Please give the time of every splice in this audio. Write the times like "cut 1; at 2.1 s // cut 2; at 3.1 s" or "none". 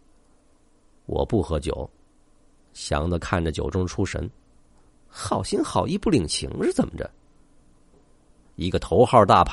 cut 1; at 4.9 s // cut 2; at 7.9 s